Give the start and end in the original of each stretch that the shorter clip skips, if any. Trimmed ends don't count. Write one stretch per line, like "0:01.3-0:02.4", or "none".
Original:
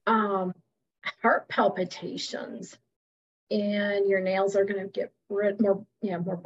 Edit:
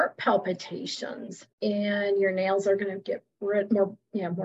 0:02.8-0:03.4